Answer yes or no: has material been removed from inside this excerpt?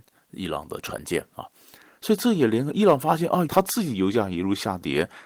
yes